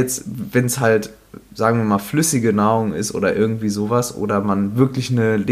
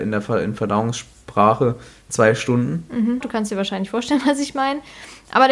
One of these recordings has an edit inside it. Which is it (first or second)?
second